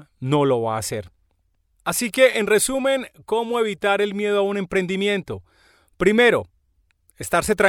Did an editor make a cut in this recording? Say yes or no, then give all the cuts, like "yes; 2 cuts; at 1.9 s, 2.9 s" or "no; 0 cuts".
no; 0 cuts